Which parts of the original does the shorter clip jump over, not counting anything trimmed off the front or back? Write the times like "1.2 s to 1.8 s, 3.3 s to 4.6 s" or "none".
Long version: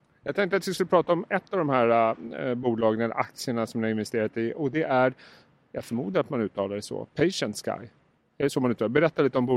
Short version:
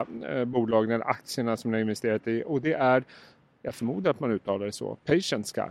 none